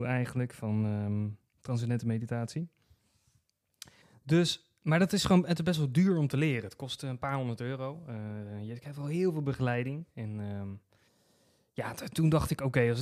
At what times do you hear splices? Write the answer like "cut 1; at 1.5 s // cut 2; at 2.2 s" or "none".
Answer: none